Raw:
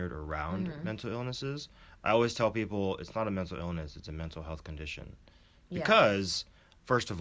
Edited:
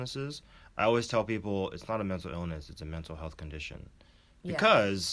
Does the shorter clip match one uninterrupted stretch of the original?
yes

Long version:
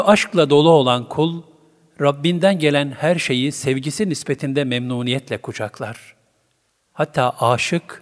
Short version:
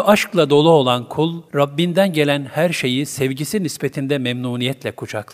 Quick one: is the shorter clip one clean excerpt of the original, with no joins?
no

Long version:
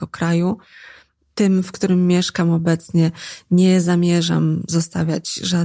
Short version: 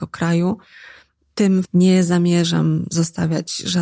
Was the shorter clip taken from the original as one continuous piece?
no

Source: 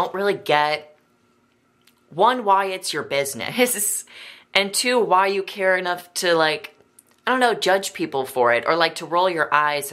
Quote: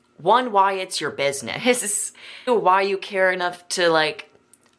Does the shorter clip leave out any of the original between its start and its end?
yes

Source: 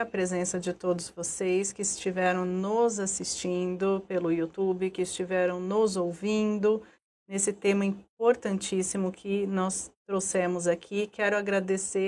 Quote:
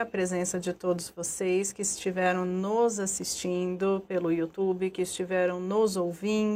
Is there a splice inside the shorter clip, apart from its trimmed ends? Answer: no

